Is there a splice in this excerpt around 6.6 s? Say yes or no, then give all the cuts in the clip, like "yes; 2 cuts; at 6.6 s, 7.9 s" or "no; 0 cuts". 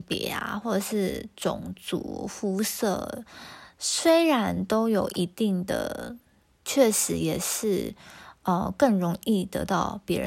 yes; 1 cut; at 6.6 s